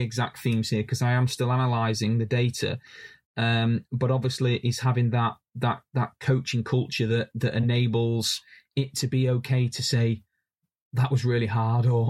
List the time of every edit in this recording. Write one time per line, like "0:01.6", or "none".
none